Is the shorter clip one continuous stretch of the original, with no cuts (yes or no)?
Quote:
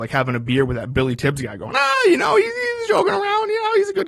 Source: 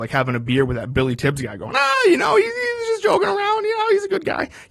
no